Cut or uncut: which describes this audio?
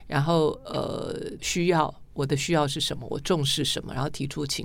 cut